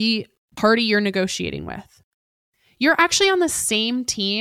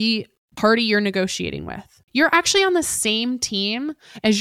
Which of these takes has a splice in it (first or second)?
second